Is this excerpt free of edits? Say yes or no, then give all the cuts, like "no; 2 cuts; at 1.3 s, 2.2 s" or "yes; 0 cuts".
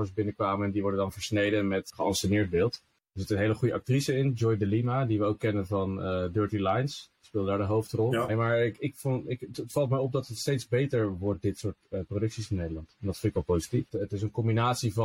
no; 1 cut; at 8.3 s